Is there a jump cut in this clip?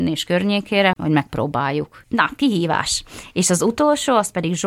yes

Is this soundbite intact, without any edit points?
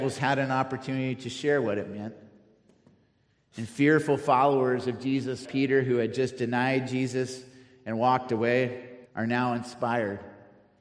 no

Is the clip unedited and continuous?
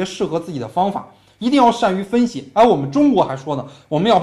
yes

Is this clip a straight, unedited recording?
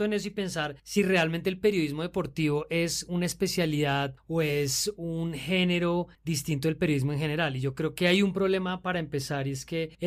yes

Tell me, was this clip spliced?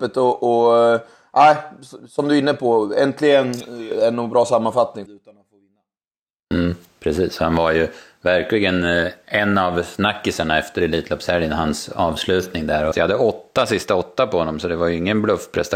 yes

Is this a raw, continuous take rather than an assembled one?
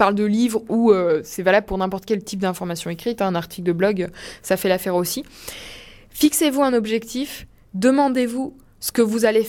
yes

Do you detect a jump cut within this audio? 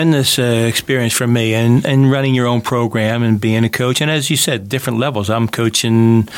no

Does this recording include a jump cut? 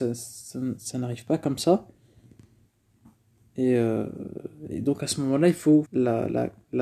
yes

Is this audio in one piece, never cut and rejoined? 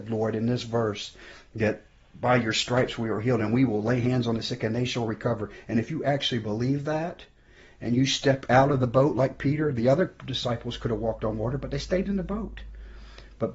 yes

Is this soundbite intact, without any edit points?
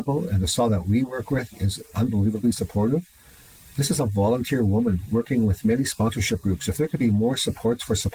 yes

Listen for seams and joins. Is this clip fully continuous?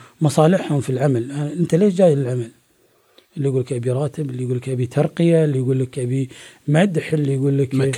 yes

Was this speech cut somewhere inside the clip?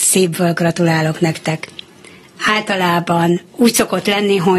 yes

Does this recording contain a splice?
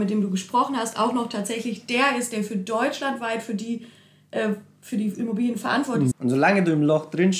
yes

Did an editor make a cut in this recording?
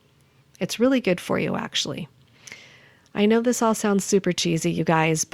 no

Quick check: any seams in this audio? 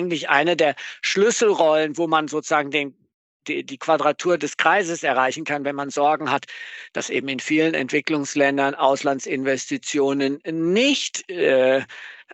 no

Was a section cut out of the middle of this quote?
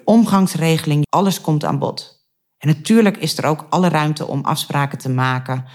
yes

